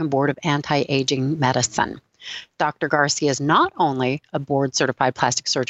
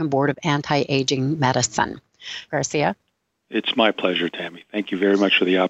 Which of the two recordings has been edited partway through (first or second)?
second